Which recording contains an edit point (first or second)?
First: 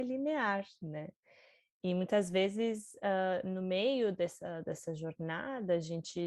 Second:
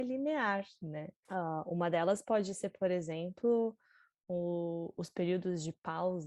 second